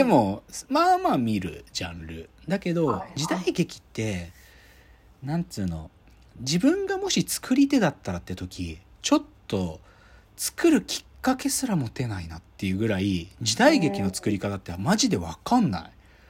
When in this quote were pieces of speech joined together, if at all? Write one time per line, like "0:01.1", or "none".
none